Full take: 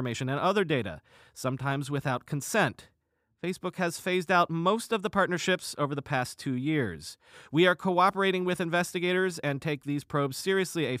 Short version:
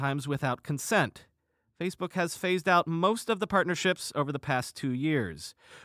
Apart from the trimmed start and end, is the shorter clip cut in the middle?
no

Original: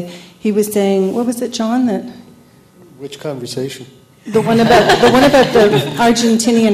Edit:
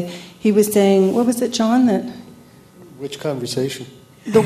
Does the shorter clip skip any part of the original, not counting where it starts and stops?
no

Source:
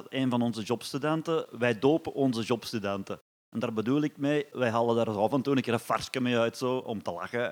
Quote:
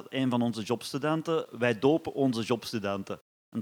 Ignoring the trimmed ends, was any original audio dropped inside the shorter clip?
no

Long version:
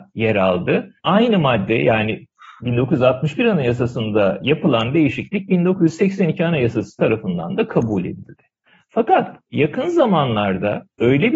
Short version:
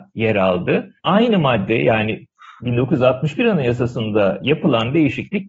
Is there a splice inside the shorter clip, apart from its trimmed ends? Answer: no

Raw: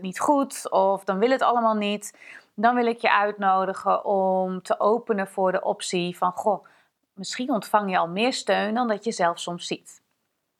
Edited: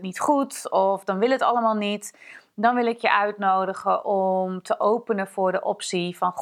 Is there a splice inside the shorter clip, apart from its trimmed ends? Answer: no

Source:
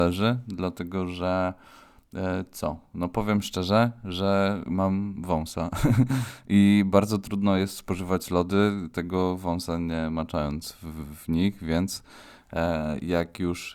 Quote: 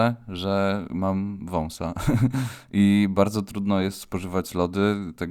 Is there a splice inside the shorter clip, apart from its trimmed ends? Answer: no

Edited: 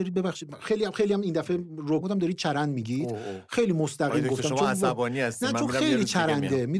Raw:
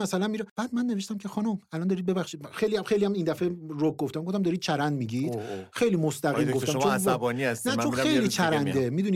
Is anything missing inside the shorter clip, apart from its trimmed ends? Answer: yes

